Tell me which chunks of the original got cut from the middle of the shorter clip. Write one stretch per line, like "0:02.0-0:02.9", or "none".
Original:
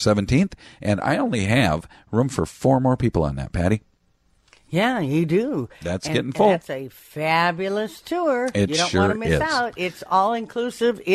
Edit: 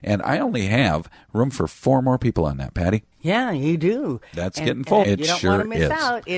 0:03.9-0:04.6
0:06.5-0:08.5